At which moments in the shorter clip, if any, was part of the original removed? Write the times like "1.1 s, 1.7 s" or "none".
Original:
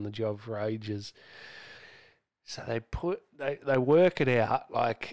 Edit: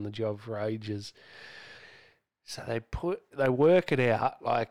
3.3 s